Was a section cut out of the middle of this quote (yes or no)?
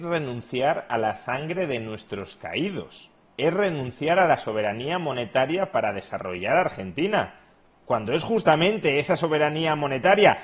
no